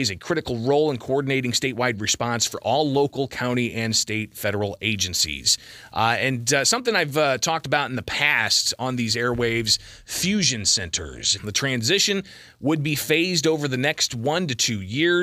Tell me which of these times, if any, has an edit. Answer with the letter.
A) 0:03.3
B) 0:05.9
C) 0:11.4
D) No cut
C